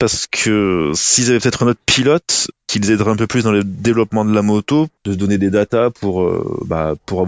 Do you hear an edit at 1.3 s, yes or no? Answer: no